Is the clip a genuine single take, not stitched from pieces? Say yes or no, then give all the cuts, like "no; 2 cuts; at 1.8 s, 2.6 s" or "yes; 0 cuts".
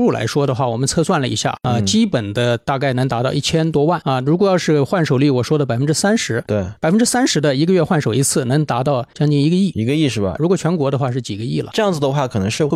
no; 2 cuts; at 10.4 s, 11.7 s